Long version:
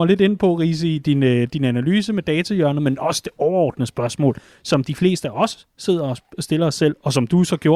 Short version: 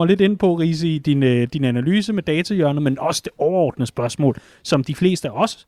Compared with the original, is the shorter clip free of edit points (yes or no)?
yes